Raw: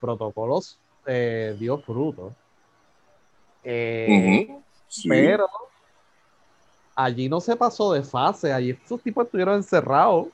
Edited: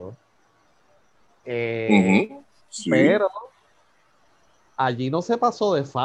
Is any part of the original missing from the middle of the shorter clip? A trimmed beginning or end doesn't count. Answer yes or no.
no